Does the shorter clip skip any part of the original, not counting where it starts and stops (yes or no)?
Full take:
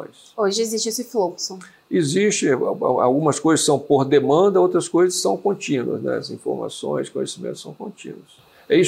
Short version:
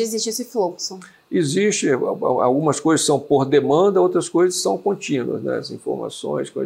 no